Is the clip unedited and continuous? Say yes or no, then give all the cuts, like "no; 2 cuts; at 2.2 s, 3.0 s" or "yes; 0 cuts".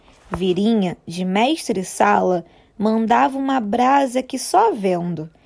yes; 0 cuts